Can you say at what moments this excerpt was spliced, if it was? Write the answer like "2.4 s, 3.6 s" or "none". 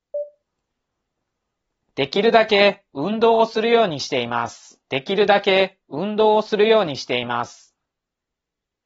4.8 s

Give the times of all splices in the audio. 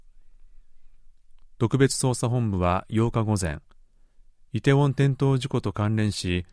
none

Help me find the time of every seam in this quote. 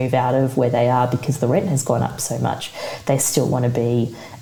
none

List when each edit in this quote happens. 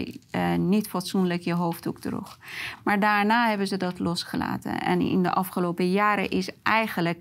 none

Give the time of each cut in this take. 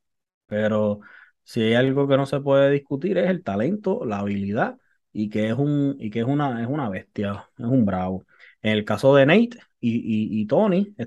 none

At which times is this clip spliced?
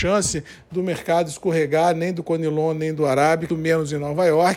3.5 s

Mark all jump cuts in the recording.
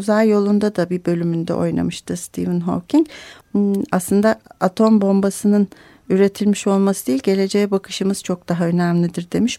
3.4 s

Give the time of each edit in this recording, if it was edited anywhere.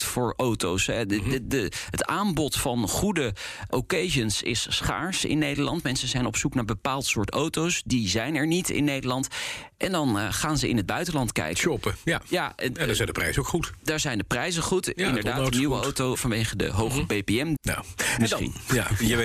16.1 s, 17.6 s

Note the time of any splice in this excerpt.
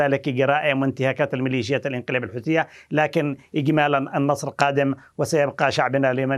none

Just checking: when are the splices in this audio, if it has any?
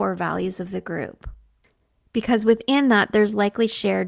none

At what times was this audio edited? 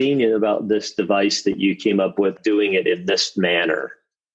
2.4 s

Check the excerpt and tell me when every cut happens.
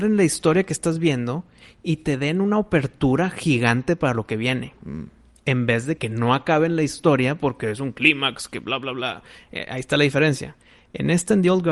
6.0 s

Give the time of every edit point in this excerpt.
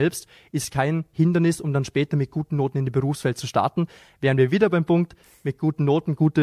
none

